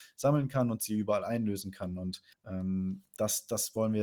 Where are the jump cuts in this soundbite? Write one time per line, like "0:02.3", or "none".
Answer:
0:02.3